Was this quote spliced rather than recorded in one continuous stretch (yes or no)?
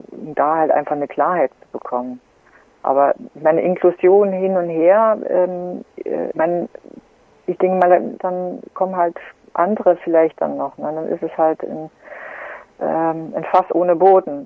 yes